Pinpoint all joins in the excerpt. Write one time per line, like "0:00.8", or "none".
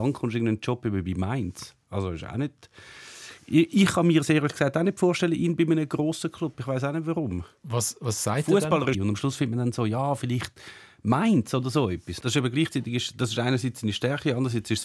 0:08.9
0:12.2